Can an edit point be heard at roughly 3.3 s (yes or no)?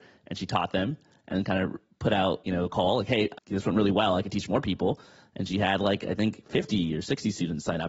yes